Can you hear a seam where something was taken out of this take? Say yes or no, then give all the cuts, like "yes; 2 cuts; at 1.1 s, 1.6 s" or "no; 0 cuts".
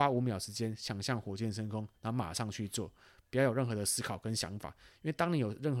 no; 0 cuts